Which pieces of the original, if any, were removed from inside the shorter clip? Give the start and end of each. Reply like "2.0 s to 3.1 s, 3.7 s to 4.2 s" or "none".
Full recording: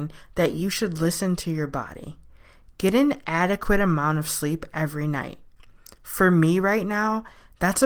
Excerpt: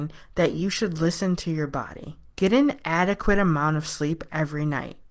2.3 s to 2.7 s